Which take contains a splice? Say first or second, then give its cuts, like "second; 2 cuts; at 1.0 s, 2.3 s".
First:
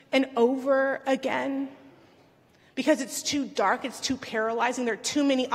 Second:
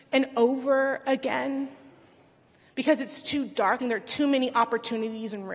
second; 1 cut; at 3.8 s